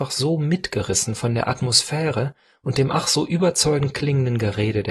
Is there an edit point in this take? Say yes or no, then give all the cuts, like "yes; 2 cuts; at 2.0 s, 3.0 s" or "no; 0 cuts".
no; 0 cuts